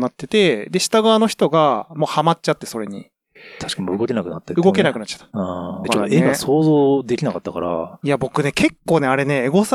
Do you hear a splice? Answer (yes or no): yes